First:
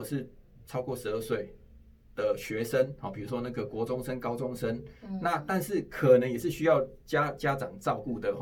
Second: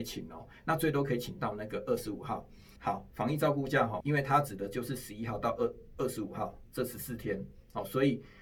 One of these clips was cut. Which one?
second; 2 cuts; at 2.8 s, 4.0 s

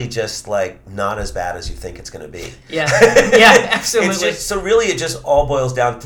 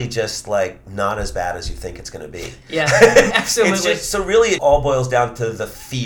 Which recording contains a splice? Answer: second; 2 cuts; at 3.3 s, 4.6 s

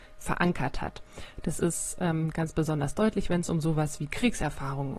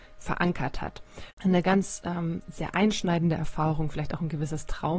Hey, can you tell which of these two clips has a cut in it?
second; 1 cut; at 1.3 s

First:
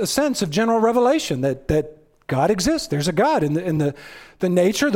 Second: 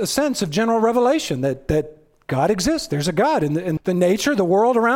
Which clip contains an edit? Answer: second; 1 cut; at 3.8 s

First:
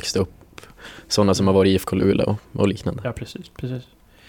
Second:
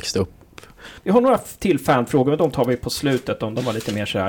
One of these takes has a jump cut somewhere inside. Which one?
second; 1 cut; at 1.0 s

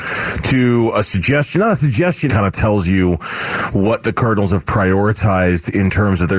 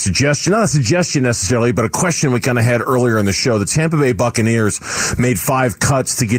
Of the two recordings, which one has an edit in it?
first; 1 cut; at 2.3 s

